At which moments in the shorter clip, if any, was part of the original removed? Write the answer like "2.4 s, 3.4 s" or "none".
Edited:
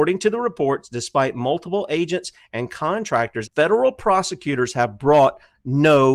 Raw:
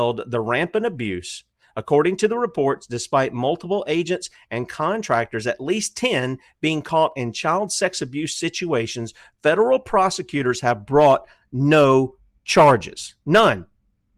3.4 s